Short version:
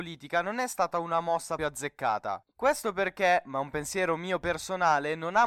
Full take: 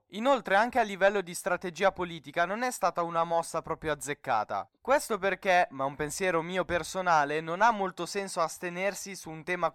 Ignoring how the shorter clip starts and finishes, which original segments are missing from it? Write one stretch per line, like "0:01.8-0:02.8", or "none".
0:03.6-0:03.8